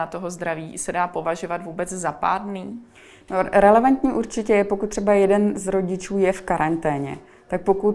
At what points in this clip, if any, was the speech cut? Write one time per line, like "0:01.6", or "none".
none

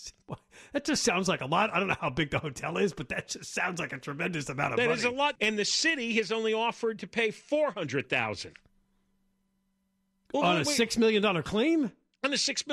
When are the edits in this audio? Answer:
0:05.4

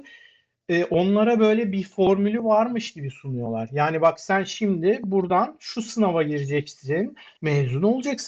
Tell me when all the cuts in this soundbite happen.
0:07.4

